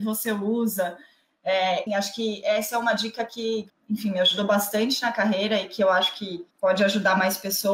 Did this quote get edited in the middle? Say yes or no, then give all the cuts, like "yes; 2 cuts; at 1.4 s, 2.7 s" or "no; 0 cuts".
yes; 3 cuts; at 1.9 s, 3.7 s, 6.5 s